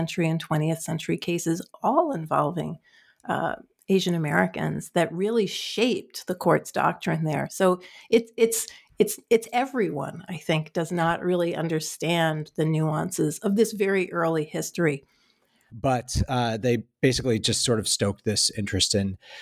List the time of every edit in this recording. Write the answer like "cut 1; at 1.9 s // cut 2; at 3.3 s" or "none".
cut 1; at 15.7 s